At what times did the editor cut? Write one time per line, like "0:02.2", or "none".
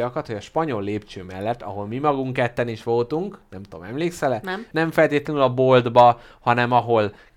0:04.7